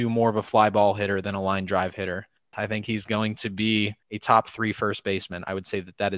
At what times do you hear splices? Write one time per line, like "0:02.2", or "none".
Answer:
0:02.5
0:04.0